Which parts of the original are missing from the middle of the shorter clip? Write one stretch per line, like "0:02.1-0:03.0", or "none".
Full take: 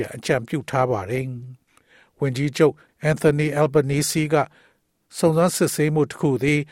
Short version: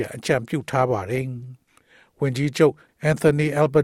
none